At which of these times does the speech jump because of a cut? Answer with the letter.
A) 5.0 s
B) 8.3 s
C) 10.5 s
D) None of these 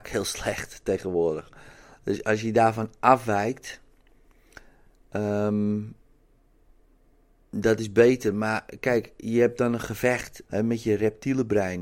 C